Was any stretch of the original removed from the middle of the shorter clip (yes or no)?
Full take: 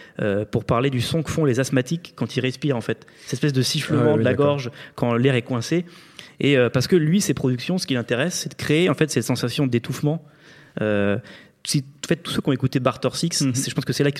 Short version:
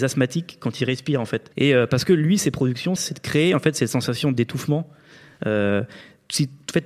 yes